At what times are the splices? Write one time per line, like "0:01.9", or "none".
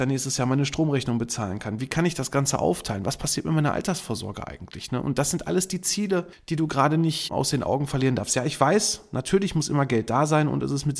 none